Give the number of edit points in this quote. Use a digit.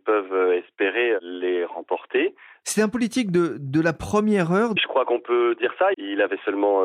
3